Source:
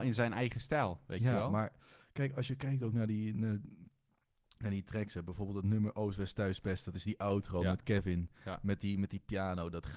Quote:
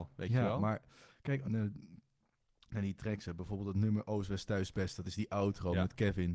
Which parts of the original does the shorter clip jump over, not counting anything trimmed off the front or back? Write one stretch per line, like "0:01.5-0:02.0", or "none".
0:02.3-0:03.3